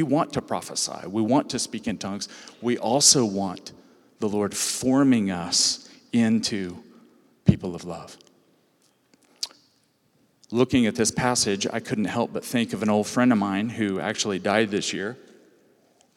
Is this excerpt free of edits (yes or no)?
yes